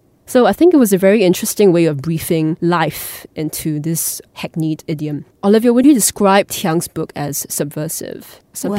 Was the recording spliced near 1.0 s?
no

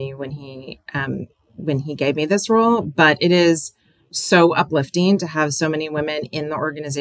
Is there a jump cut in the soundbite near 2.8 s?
no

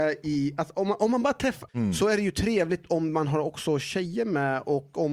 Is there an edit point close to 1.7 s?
yes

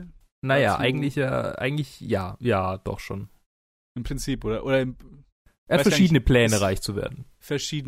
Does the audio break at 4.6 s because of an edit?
no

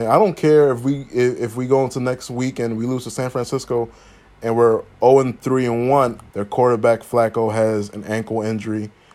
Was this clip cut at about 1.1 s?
no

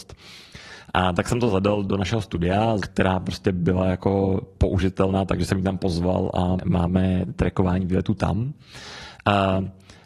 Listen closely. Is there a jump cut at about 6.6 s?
yes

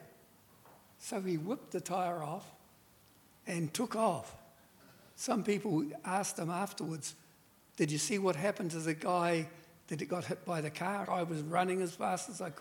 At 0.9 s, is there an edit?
no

